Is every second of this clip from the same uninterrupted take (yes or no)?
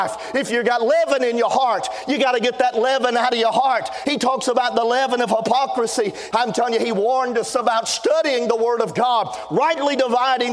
no